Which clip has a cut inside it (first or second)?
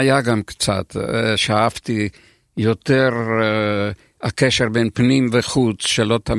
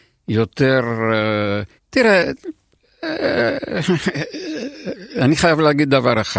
second